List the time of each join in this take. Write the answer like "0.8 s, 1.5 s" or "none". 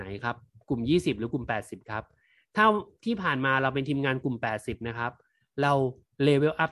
none